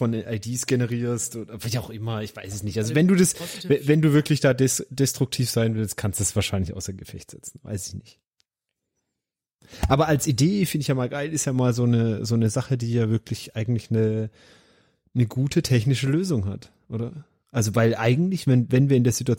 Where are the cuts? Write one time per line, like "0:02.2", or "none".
none

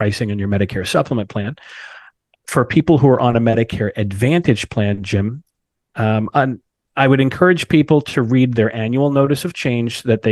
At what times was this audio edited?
none

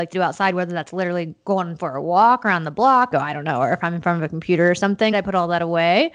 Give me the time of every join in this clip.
0:03.1
0:05.1

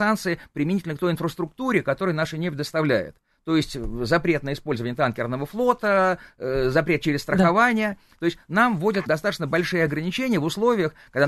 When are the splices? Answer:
0:09.1

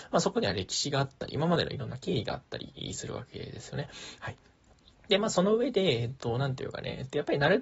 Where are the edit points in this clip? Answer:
0:04.2

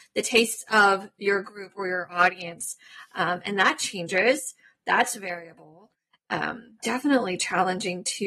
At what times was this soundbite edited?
0:06.8

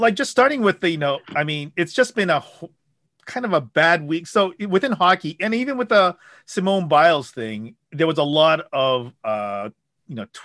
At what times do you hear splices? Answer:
0:07.8

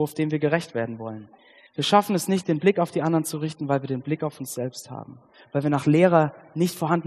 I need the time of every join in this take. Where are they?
0:01.7

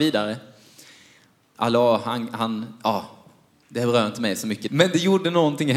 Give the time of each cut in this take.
0:01.5
0:04.7

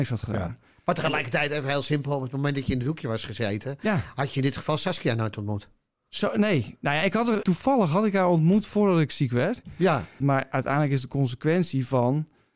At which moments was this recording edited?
0:07.4
0:10.2

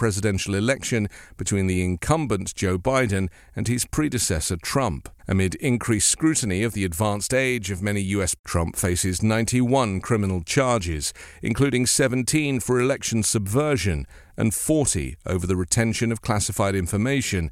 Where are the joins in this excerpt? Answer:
0:05.2
0:08.4

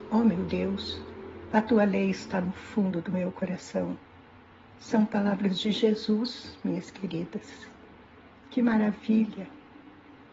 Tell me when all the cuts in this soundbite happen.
none

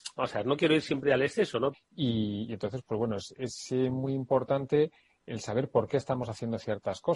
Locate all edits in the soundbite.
0:01.7

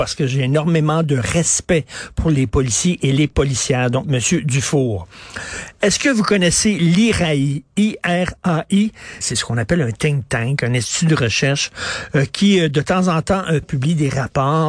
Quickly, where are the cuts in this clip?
0:04.0
0:09.2
0:13.6

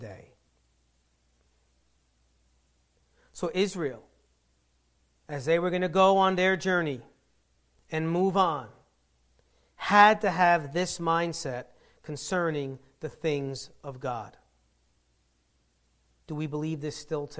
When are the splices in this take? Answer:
none

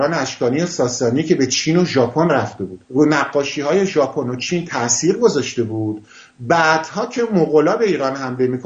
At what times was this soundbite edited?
0:02.8

